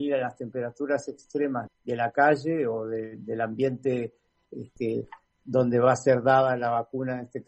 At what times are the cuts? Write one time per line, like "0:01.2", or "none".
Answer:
0:01.7